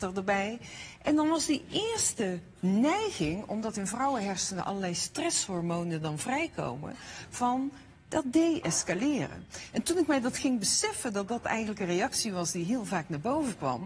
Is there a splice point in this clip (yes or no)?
no